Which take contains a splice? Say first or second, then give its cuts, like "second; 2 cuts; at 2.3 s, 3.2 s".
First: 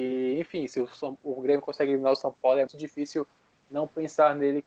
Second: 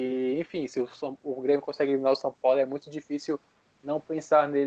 first; 1 cut; at 2.7 s